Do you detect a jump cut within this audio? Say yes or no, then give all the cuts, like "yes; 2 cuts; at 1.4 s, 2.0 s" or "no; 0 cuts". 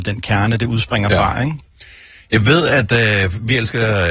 no; 0 cuts